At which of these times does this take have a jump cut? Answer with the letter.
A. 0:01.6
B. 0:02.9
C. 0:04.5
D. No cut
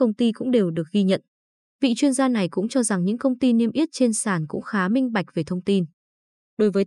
D